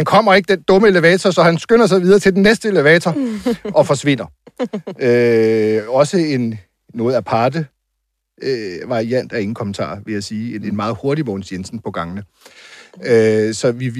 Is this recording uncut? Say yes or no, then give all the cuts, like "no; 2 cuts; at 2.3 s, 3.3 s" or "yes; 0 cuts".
yes; 0 cuts